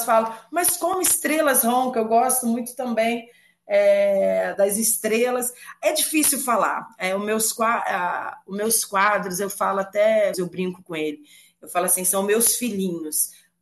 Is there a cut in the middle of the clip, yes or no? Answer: yes